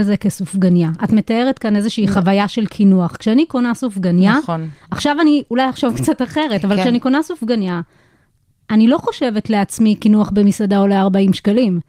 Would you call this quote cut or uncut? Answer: uncut